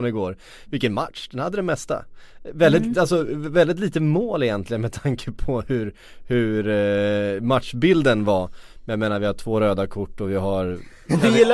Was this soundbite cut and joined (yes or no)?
no